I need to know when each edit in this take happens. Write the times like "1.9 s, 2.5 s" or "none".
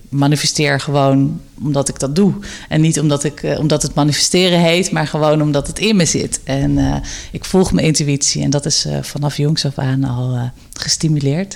none